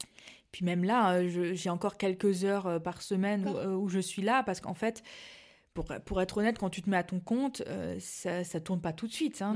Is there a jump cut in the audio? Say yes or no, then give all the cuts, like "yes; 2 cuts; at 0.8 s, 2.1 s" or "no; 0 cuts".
yes; 1 cut; at 3.4 s